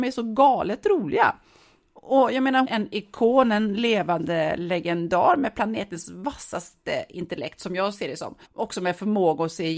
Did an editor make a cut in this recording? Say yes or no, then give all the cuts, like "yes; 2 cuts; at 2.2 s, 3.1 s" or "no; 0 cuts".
yes; 2 cuts; at 2.6 s, 8.4 s